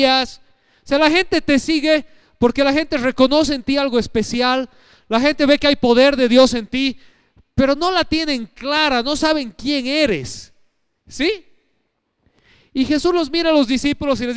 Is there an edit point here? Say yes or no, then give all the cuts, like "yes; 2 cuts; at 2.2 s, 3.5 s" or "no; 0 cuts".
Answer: no; 0 cuts